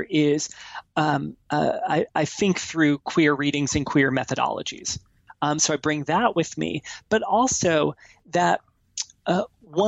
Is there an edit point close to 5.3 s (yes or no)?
yes